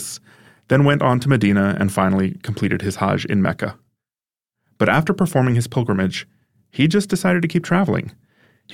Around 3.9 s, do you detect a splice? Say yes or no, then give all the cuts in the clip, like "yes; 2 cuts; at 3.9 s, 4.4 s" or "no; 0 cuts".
no; 0 cuts